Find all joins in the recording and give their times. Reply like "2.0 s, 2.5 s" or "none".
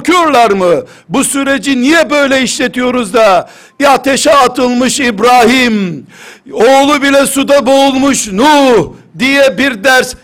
none